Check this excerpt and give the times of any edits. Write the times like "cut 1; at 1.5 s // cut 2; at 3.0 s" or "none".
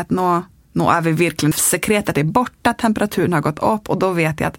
cut 1; at 1.5 s